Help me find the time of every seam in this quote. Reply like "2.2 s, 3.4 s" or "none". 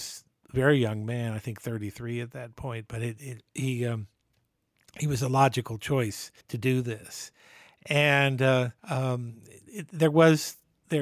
6.4 s, 8.8 s